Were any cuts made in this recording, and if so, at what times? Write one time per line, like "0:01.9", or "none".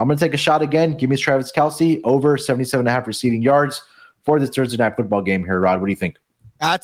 none